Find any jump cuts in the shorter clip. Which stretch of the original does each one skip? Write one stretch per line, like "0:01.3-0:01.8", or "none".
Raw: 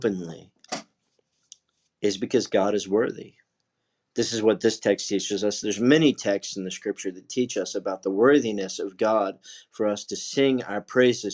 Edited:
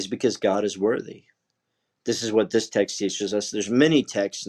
none

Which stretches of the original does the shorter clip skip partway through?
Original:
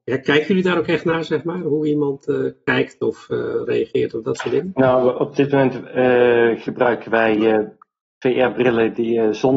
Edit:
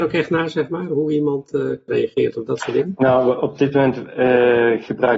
0:02.6-0:03.7

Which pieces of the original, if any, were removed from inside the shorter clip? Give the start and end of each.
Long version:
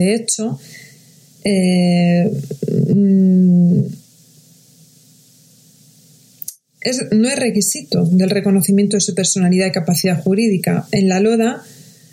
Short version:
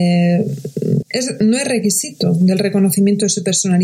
0:02.9-0:06.7

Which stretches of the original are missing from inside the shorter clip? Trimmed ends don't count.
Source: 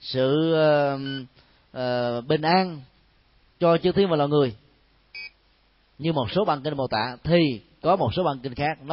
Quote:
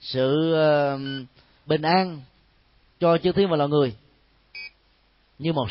0:01.7-0:02.3

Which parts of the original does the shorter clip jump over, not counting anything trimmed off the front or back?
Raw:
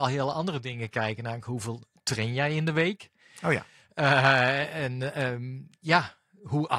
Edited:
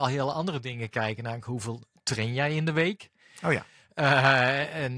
none

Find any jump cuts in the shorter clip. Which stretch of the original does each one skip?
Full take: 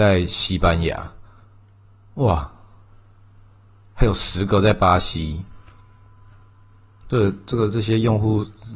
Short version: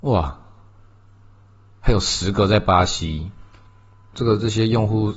0:06.3-0:07.4

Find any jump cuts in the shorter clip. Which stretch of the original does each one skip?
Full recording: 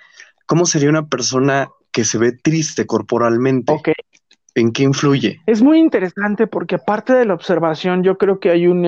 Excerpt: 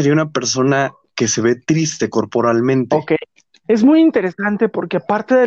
0:04.4-0:05.4

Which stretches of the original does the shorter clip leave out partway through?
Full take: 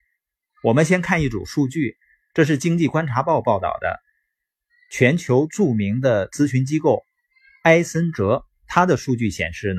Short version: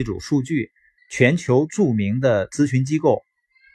0:02.2-0:04.8

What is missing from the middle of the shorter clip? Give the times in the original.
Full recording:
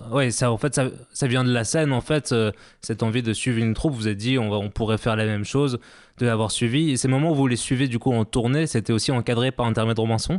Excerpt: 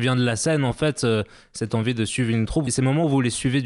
0:04.0-0:06.9

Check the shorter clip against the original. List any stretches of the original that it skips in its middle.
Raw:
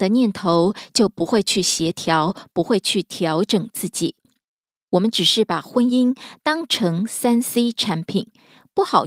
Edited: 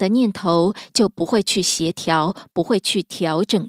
none

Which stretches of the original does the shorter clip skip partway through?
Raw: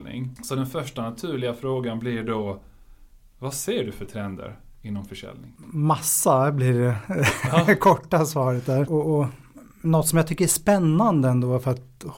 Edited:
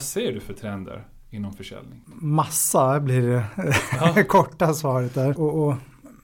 none

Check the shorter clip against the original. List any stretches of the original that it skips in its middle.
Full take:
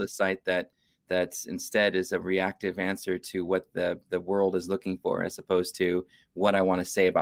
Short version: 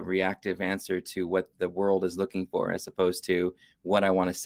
0:03.7-0:04.0

